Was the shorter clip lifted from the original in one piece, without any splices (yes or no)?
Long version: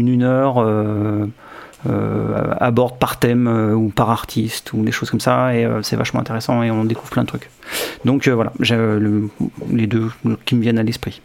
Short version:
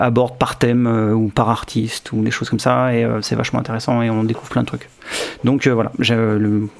yes